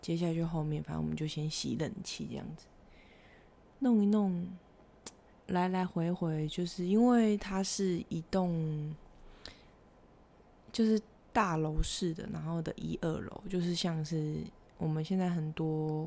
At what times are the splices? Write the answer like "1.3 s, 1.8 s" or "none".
5.3 s

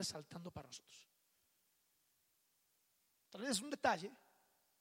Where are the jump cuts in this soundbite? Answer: none

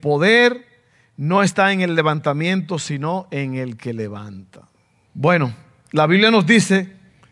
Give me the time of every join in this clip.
5.1 s

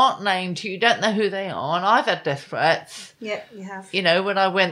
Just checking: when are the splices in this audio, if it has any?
none

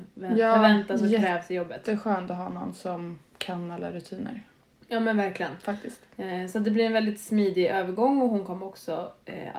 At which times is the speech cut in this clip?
none

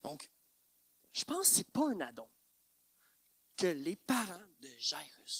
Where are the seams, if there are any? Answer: none

